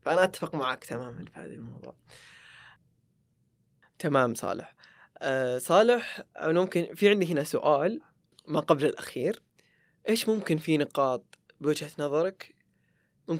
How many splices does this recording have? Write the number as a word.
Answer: zero